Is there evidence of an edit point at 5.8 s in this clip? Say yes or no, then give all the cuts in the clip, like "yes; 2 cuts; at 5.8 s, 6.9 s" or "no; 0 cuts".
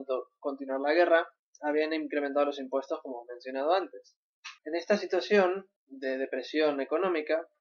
yes; 2 cuts; at 4.6 s, 5.8 s